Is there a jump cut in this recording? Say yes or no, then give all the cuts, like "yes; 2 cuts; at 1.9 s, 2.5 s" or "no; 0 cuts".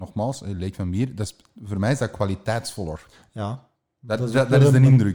no; 0 cuts